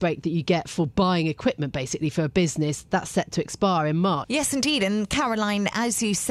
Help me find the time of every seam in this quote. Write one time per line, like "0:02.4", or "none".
0:04.2